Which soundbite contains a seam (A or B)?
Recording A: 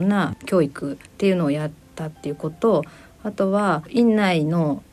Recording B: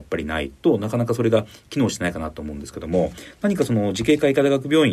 A